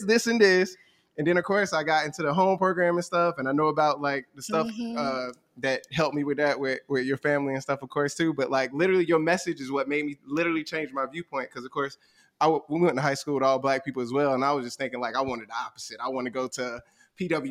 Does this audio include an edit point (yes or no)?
no